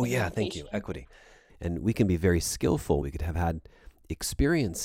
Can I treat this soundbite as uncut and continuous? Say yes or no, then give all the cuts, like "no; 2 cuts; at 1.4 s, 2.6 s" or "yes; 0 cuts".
no; 2 cuts; at 1.5 s, 3.0 s